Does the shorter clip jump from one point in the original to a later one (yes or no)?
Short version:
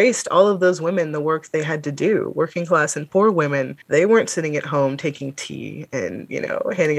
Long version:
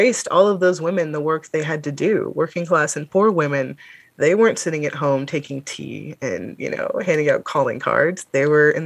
yes